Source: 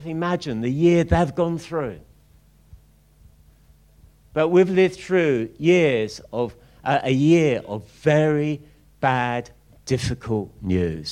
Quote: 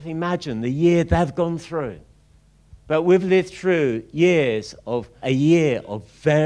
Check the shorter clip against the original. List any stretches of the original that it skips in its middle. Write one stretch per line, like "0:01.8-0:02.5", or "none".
0:02.8-0:04.3
0:06.7-0:07.0